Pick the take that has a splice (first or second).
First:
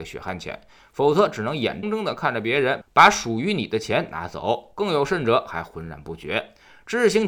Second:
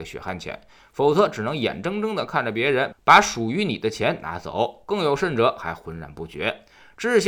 first